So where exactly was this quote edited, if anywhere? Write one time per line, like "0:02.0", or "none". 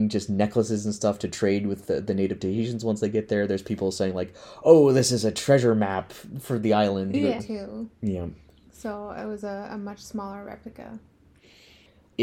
0:07.4